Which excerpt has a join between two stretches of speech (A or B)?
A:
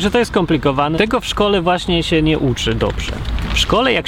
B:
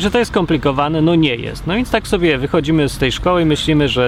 A